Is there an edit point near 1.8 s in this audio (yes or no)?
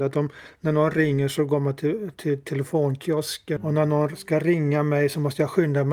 no